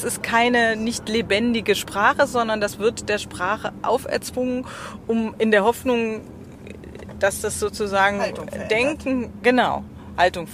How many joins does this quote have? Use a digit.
0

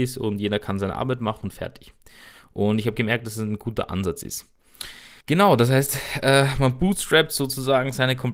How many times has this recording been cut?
1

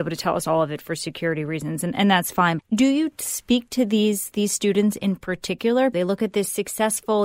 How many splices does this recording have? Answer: 2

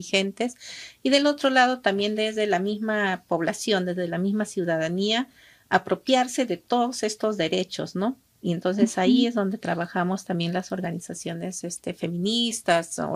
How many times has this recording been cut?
0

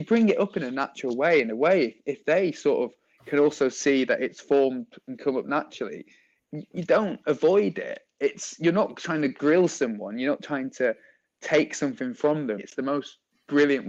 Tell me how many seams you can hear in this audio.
1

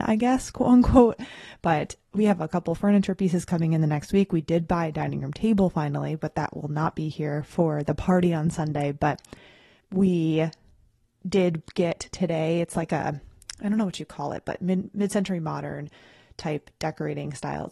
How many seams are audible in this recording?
1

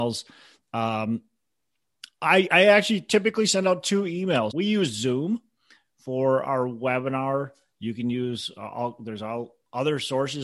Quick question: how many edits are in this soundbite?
1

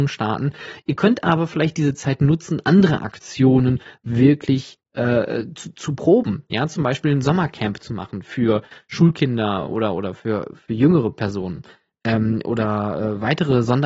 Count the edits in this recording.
0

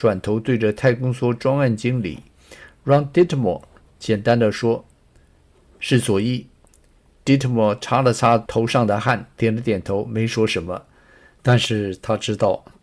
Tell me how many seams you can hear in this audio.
0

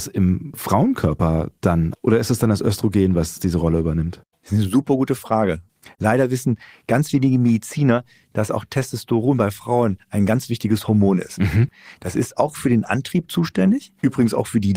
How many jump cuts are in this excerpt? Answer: 1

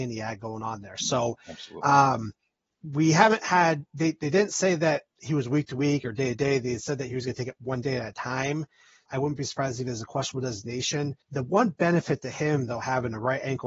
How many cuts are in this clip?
2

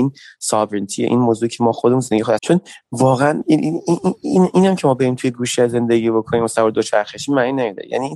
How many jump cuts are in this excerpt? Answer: 1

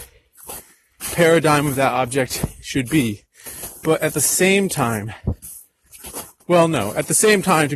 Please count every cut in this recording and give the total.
1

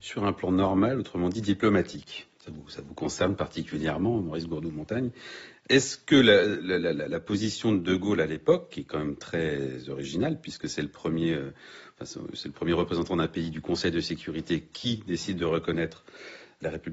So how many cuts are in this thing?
1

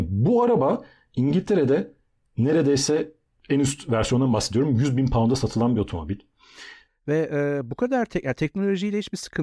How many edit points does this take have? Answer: 1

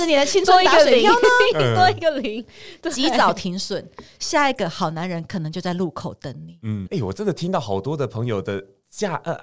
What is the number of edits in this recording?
1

